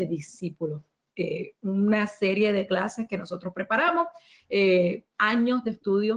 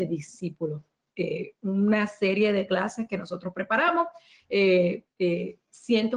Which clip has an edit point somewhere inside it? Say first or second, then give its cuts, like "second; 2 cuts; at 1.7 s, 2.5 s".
second; 1 cut; at 5.1 s